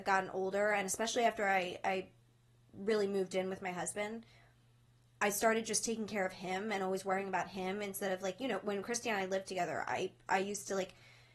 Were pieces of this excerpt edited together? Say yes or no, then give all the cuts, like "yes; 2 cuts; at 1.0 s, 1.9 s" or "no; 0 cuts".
no; 0 cuts